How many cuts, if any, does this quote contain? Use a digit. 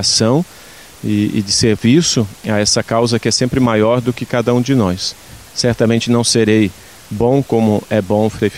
1